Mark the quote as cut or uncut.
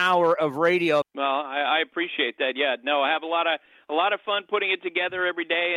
cut